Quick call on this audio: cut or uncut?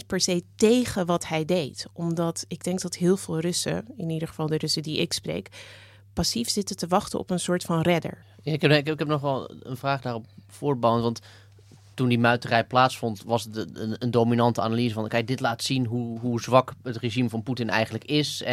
cut